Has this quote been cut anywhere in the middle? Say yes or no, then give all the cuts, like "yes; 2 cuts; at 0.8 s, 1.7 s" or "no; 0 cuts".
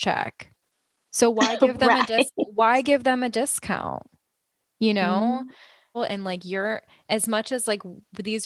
yes; 1 cut; at 5.9 s